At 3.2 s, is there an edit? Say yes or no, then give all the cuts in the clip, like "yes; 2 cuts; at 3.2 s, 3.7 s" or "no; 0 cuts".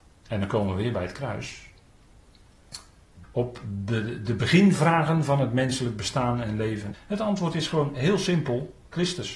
yes; 2 cuts; at 3.2 s, 6.9 s